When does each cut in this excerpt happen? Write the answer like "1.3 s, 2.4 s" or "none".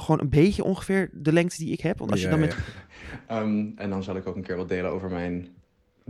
2.5 s